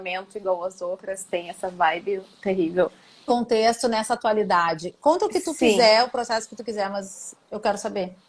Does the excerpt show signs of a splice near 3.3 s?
yes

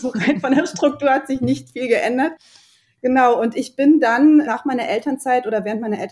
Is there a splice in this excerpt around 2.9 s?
no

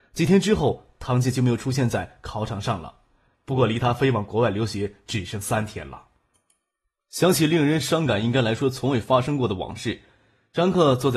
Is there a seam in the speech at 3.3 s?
yes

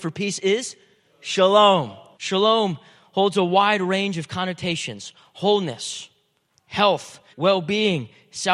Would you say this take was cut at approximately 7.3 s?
yes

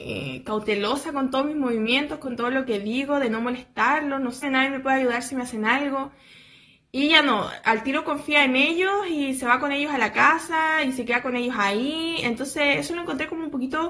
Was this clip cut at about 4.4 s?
yes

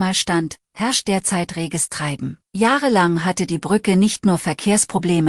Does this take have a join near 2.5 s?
yes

